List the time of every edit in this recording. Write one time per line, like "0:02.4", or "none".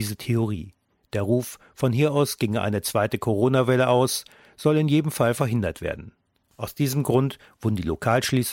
0:00.9